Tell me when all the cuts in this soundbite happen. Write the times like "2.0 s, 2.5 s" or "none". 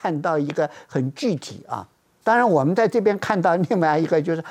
2.2 s

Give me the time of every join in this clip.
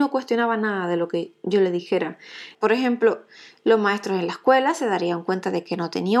2.5 s

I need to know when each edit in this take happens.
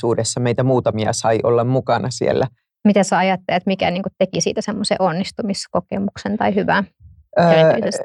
2.7 s

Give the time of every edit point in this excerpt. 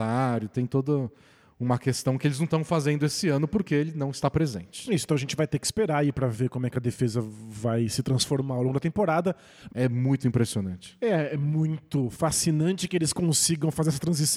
9.7 s

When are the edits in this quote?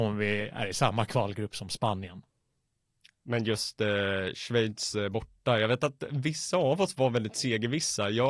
none

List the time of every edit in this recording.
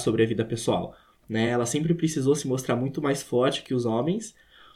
none

